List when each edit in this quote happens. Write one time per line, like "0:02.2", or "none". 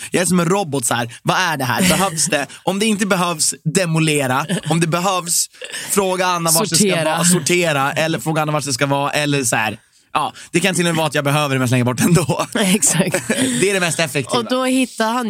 none